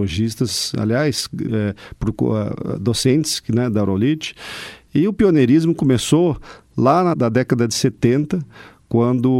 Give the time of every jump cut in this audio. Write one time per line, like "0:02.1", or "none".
0:01.5
0:07.1